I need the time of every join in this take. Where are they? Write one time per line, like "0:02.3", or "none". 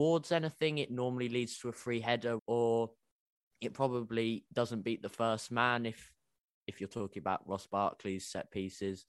0:02.4